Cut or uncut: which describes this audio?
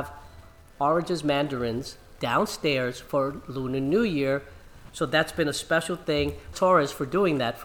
cut